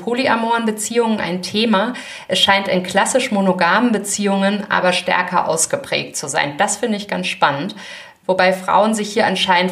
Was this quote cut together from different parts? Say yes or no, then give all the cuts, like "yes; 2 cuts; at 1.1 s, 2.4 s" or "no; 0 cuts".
no; 0 cuts